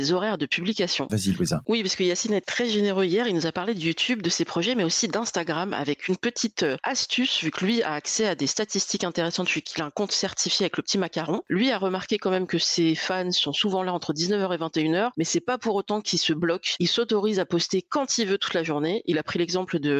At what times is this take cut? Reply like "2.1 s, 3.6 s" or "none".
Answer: 1.1 s, 11.4 s